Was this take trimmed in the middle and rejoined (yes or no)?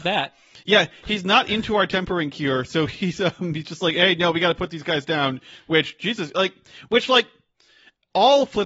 no